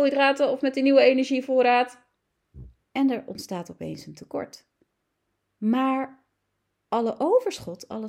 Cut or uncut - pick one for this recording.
cut